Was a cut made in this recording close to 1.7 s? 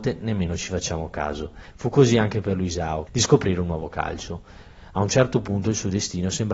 yes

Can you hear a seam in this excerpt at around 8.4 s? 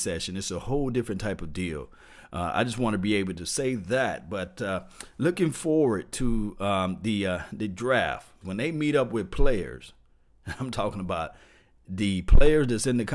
yes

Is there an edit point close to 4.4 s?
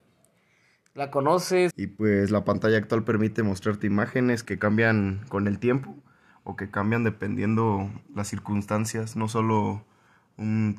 yes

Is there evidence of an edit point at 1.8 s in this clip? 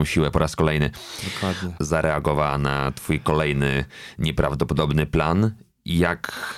yes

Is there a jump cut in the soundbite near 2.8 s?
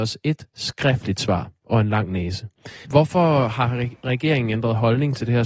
yes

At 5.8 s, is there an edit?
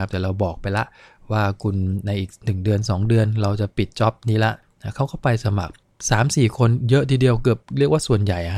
yes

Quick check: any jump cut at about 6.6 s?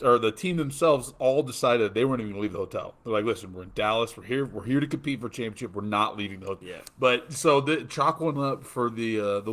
yes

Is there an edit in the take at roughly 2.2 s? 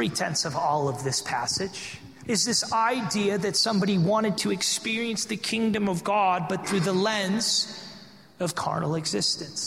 yes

